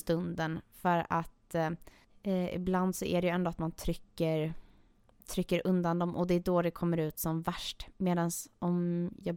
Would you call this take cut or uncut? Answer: uncut